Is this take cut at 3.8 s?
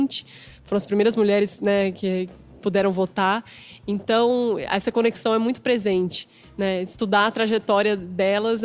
no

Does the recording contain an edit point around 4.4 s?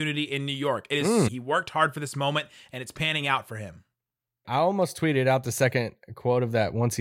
yes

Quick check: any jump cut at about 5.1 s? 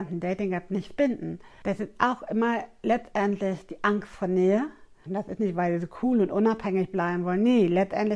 yes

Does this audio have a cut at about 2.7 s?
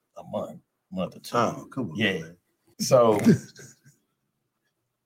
yes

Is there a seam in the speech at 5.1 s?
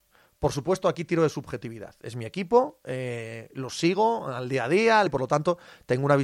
yes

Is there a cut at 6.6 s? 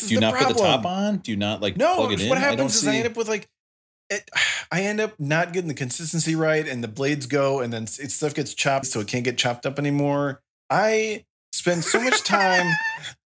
no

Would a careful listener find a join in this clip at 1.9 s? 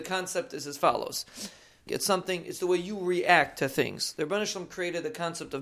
yes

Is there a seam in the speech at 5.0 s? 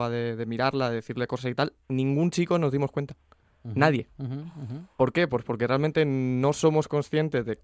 no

